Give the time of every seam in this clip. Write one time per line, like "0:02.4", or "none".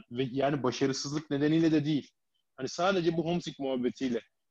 none